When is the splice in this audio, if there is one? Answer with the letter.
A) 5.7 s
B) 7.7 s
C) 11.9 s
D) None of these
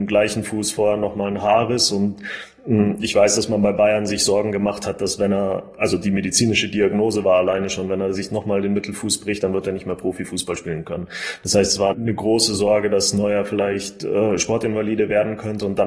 C